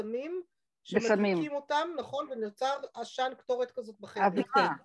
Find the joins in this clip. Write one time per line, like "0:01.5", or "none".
none